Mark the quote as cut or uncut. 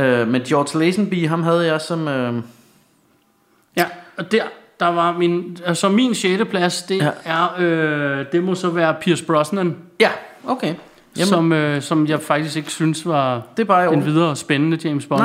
uncut